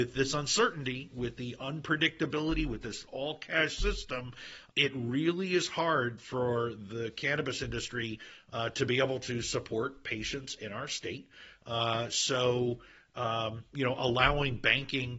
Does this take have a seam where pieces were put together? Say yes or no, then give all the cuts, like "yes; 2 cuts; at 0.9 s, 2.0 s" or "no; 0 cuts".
yes; 1 cut; at 4.7 s